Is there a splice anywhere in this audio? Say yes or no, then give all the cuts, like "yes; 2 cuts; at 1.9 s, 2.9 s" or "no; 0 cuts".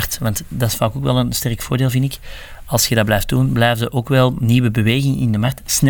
no; 0 cuts